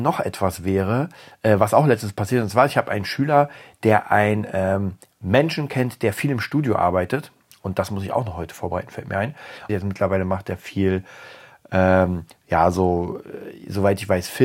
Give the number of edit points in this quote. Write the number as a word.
one